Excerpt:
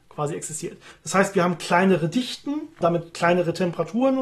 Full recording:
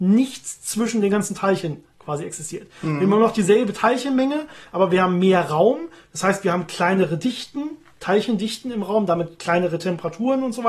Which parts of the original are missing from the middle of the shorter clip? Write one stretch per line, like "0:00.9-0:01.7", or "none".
0:02.8-0:06.0
0:07.9-0:09.1